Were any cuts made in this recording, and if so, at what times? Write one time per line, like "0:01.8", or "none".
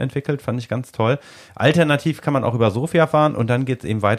none